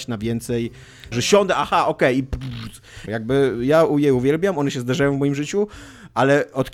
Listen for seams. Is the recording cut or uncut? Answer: cut